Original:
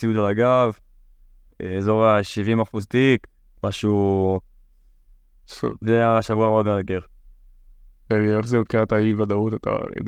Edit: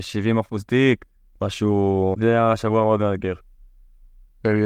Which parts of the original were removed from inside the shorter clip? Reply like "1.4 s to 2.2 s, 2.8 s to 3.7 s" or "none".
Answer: 4.4 s to 5.8 s